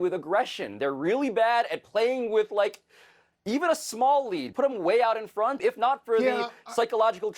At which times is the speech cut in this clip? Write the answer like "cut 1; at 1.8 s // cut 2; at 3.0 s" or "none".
cut 1; at 4.5 s // cut 2; at 5.6 s